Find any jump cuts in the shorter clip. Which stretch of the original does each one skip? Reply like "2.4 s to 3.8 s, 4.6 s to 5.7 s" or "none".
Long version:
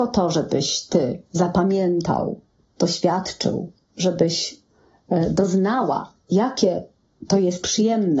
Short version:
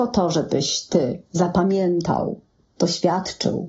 none

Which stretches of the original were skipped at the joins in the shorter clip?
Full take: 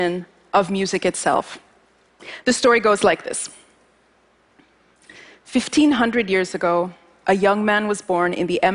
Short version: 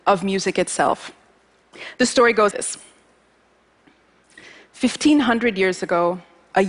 3.0 s to 3.2 s

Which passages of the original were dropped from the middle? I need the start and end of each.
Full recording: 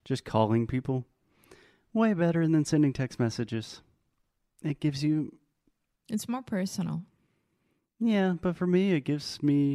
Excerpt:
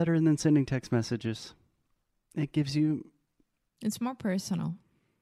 none

